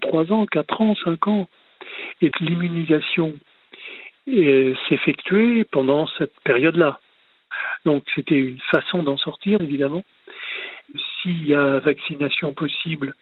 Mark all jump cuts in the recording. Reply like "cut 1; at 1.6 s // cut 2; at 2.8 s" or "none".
cut 1; at 2.3 s // cut 2; at 9.6 s